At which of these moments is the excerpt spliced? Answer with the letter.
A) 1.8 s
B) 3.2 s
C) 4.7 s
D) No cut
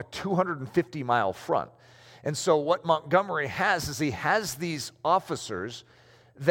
D